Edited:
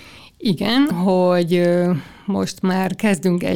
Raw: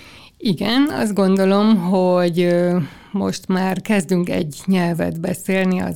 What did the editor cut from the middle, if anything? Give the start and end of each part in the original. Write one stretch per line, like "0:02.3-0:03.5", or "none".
0:00.9-0:01.8